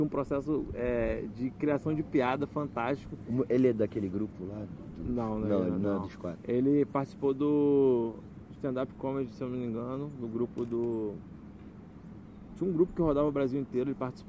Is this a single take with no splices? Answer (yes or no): yes